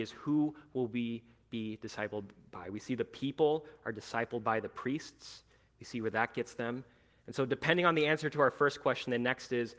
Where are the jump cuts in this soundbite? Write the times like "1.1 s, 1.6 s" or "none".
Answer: none